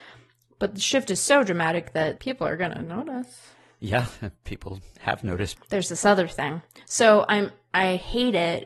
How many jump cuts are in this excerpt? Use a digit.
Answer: 2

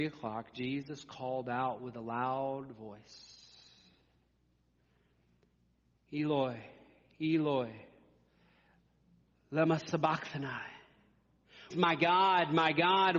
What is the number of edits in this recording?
1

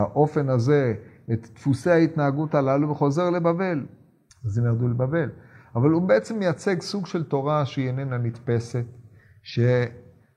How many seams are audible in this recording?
1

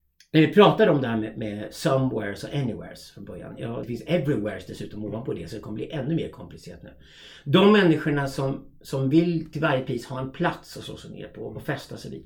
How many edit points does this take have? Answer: 1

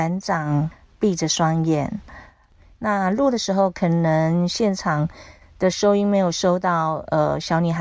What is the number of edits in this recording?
1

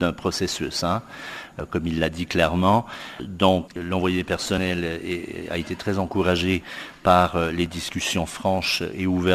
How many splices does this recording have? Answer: 0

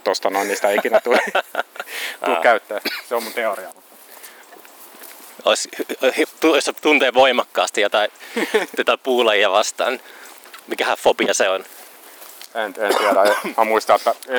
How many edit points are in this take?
1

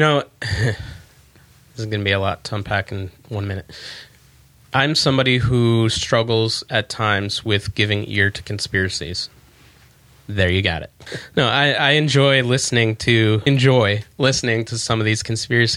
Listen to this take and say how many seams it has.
2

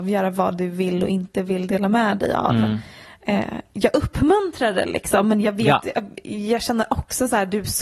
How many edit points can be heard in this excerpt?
0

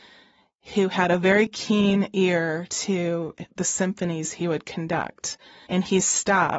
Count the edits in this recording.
1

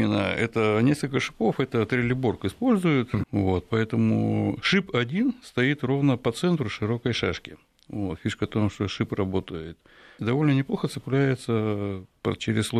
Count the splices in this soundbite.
2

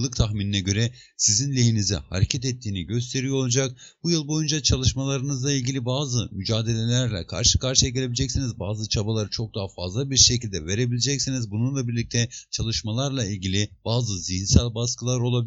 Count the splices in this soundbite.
0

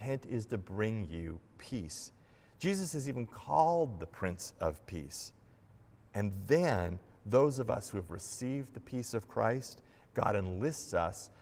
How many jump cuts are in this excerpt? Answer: 0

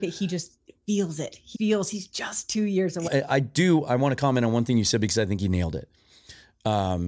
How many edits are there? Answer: 2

